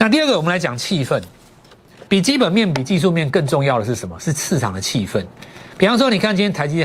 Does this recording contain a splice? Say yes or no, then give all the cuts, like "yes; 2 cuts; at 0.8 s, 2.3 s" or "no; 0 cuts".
yes; 1 cut; at 2.1 s